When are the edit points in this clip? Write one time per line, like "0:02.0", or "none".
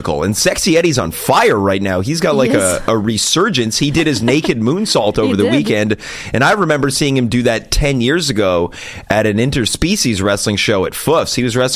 none